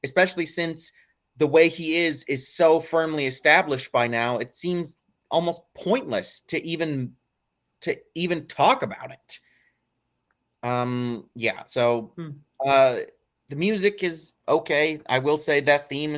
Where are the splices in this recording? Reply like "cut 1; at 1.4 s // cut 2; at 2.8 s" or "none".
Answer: none